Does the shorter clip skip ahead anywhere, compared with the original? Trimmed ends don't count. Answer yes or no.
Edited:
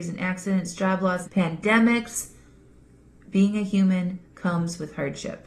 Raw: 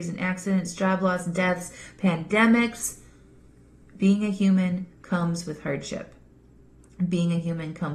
yes